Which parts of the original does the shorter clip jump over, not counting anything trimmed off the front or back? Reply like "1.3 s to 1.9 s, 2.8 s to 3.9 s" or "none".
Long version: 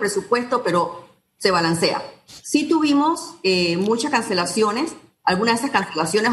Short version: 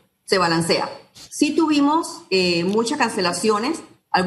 none